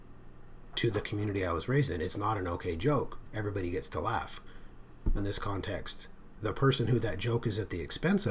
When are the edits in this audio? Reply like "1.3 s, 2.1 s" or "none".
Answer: 3.2 s, 5.2 s